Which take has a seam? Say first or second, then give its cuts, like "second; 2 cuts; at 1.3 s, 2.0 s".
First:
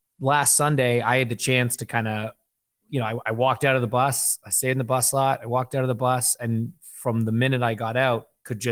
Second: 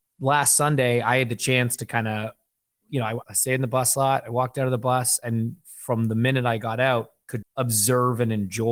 second; 2 cuts; at 3.2 s, 7.4 s